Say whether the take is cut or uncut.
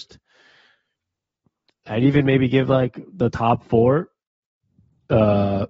uncut